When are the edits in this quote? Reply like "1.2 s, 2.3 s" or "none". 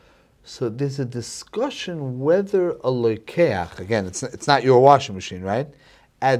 none

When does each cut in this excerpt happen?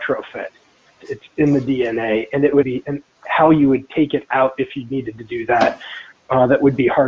1.0 s, 2.6 s

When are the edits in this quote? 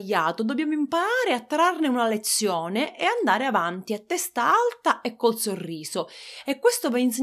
none

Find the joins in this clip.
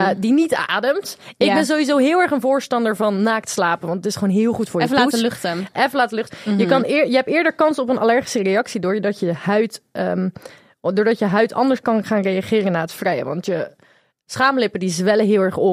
6.3 s

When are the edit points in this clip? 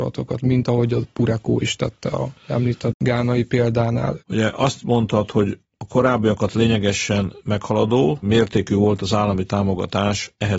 4.2 s

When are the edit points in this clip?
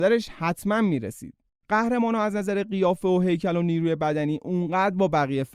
1.5 s

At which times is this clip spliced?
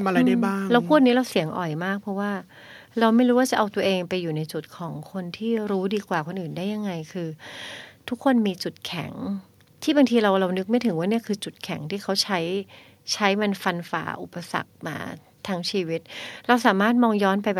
none

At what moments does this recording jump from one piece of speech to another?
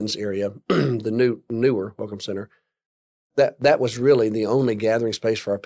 none

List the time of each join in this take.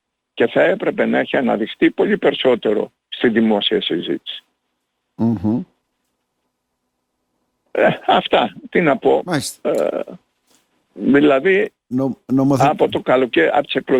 none

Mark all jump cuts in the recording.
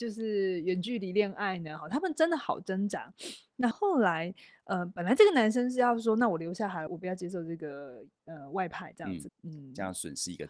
3.7 s, 6.9 s, 9.3 s

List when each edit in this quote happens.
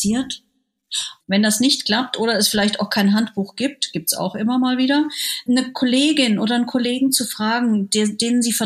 1.2 s, 5.5 s

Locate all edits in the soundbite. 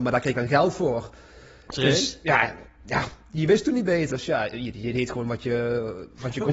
4.1 s

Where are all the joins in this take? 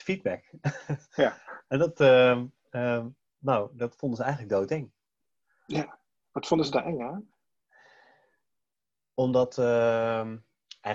none

